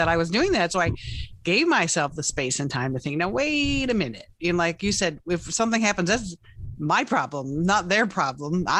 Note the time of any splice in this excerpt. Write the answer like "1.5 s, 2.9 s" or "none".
none

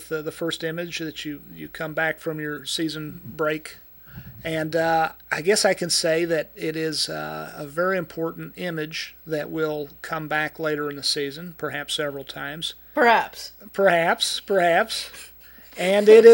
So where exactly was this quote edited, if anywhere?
none

